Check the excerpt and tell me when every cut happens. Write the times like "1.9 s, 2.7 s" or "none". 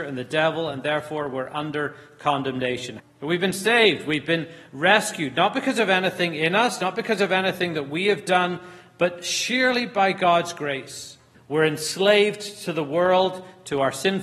3.0 s, 11.3 s